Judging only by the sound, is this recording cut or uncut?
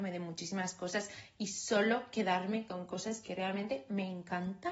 uncut